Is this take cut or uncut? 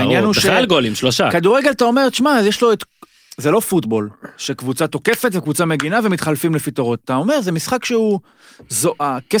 uncut